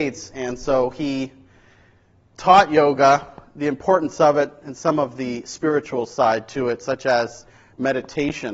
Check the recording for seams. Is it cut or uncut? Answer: uncut